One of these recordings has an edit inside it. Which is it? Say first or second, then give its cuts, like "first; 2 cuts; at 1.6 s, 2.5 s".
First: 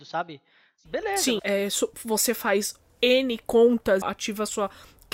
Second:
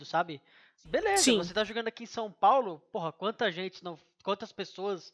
first; 2 cuts; at 1.4 s, 4.0 s